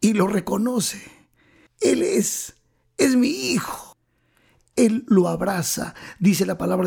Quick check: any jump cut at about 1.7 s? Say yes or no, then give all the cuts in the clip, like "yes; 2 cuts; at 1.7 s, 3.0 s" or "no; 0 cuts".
yes; 2 cuts; at 1.7 s, 4.7 s